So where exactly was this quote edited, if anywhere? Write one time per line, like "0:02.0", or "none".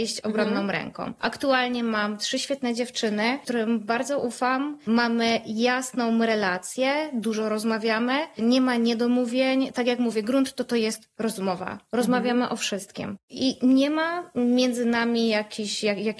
none